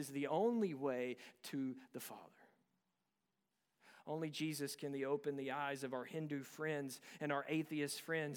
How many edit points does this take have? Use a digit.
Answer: 0